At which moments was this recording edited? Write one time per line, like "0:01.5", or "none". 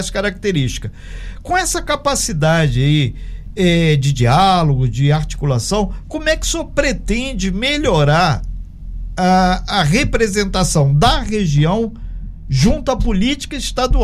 none